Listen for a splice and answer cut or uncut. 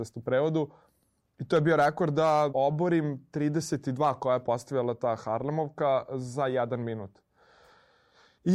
cut